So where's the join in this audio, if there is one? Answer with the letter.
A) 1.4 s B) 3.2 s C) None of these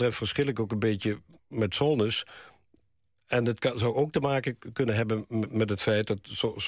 A